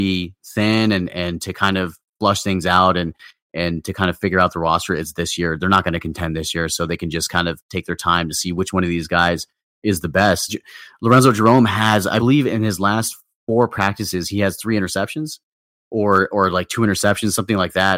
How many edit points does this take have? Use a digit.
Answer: 1